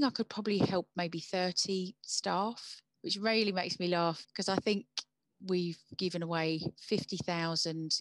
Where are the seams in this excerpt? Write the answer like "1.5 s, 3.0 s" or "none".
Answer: 4.2 s